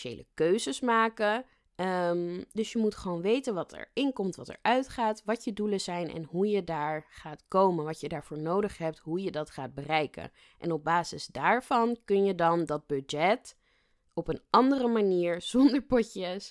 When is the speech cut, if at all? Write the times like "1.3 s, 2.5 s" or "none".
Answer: none